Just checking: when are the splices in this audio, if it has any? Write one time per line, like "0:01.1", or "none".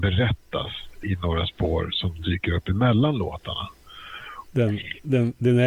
0:01.0
0:04.5